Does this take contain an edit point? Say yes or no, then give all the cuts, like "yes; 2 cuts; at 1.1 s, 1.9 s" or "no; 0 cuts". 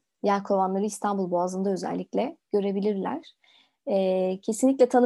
no; 0 cuts